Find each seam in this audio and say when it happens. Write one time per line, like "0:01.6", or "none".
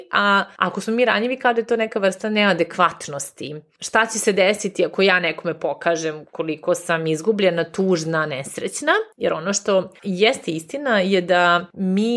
0:09.1

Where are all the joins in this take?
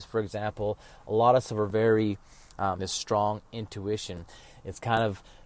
0:02.8

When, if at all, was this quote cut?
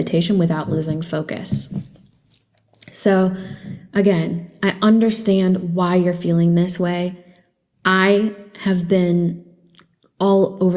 none

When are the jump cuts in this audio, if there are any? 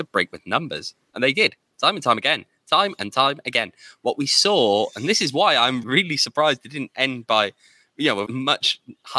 0:05.8
0:08.2

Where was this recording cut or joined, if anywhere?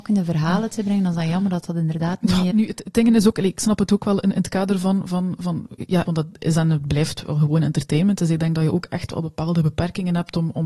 0:02.5
0:06.0

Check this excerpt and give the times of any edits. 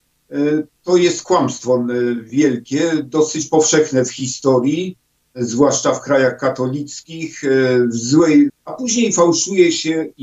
0:08.5

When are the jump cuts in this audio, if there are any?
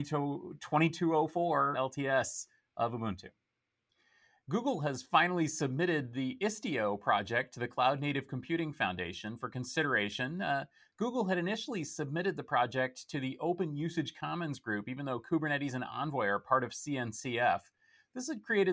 0:01.7

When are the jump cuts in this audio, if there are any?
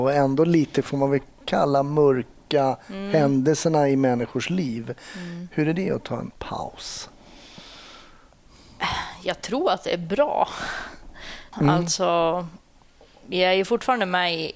0:11.5

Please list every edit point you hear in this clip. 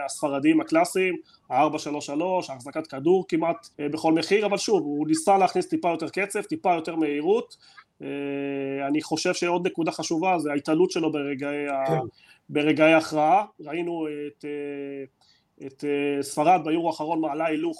0:03.7

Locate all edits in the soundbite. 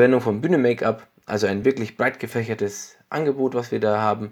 none

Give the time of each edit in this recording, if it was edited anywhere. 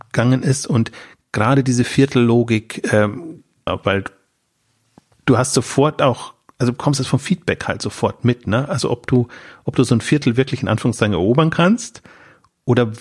0:03.7

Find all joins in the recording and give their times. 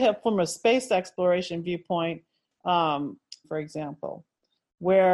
0:03.4

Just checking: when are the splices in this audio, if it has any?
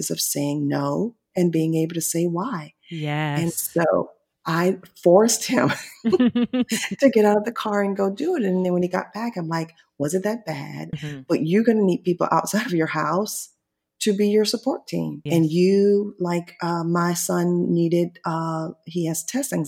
0:10.9
0:15.3

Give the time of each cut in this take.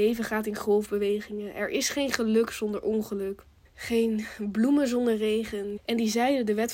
0:03.6
0:05.8

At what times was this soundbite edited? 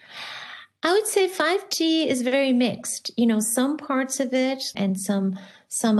0:04.7

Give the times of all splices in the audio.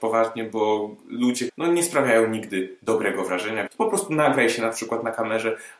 0:01.5
0:03.7

